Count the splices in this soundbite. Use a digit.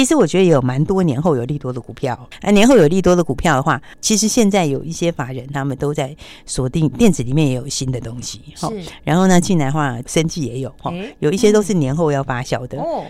1